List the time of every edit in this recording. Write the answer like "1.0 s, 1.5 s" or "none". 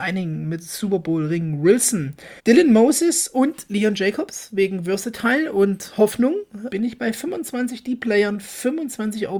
2.4 s, 6.7 s